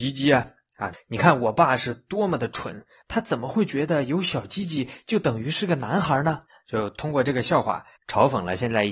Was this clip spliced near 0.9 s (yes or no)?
yes